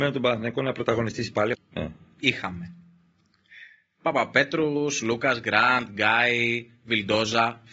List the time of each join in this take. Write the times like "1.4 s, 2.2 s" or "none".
1.5 s